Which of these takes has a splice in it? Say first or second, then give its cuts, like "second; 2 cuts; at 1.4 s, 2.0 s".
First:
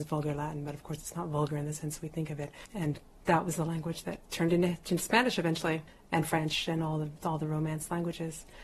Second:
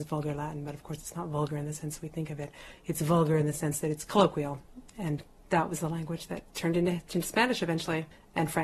first; 1 cut; at 2.6 s